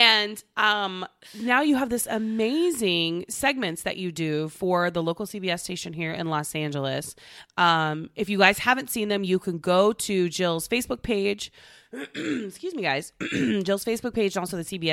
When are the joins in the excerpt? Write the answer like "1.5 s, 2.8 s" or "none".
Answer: none